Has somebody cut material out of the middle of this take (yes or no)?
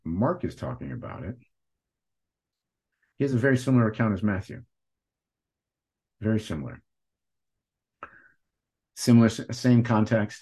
no